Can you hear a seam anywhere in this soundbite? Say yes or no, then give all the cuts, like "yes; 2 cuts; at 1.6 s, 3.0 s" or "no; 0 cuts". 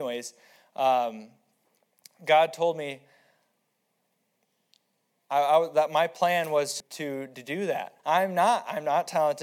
yes; 2 cuts; at 6.8 s, 8.0 s